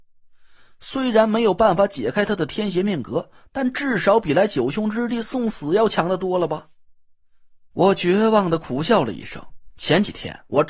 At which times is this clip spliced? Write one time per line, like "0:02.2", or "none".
0:09.7